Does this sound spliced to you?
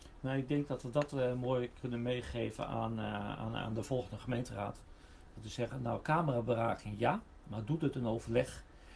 no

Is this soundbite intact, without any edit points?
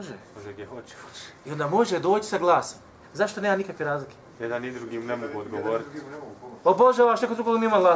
no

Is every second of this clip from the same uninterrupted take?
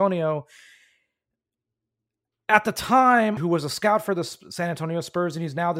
no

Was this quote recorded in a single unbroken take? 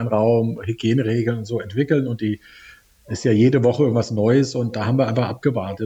yes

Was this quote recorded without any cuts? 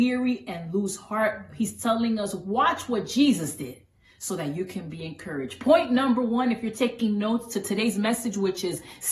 yes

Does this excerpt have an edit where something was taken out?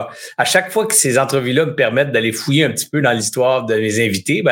no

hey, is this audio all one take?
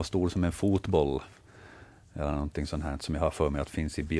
yes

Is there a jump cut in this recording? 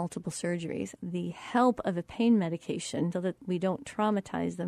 yes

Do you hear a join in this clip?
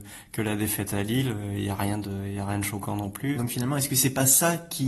yes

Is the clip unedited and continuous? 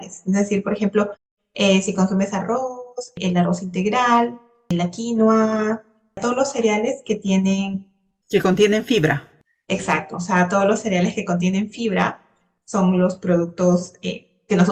yes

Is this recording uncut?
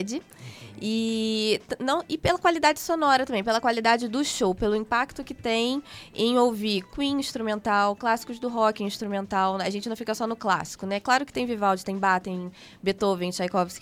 yes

